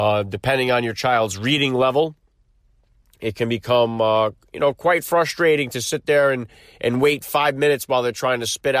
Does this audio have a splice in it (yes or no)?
no